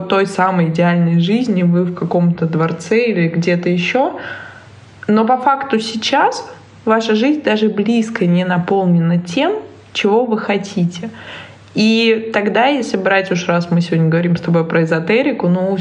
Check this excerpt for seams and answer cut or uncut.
uncut